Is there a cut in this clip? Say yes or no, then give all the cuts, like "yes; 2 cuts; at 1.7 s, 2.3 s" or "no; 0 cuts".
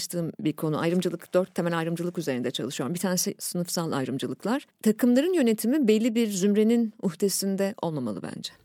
yes; 1 cut; at 4.7 s